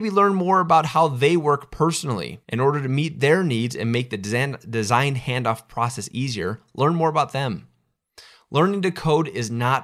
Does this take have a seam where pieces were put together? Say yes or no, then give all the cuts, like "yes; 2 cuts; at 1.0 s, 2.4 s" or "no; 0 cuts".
yes; 1 cut; at 2.4 s